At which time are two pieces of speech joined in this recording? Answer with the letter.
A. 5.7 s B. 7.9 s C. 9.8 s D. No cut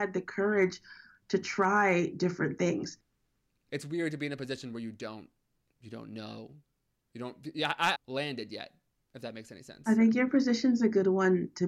B